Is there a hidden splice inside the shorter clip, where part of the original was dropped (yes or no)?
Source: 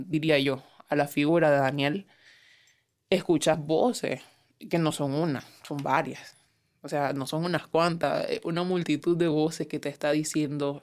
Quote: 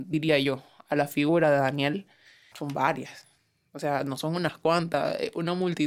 yes